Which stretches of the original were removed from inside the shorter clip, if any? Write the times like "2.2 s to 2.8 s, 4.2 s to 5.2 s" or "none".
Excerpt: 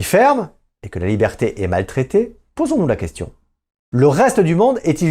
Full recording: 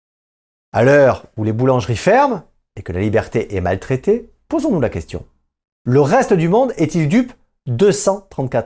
none